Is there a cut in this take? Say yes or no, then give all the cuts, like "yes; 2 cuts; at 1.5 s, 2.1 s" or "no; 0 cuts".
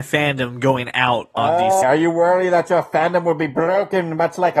yes; 1 cut; at 1.8 s